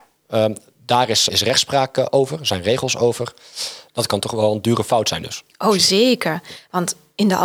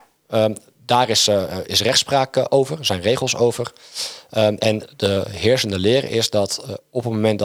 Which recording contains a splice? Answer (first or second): first